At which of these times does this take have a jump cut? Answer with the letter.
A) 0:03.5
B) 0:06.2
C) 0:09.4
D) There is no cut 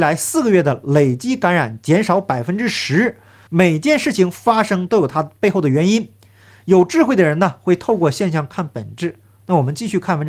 A